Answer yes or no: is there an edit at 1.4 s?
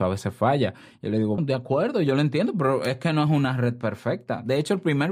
yes